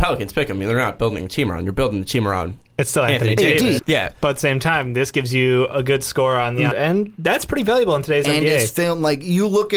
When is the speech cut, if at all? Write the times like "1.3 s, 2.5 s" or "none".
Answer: 3.8 s, 6.7 s